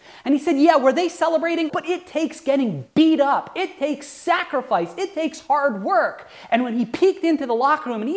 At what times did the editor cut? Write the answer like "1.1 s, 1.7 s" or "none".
1.7 s